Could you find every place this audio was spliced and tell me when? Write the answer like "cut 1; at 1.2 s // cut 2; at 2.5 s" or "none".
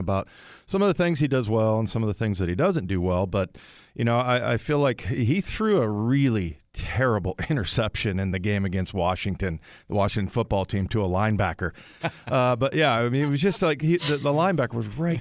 cut 1; at 12.0 s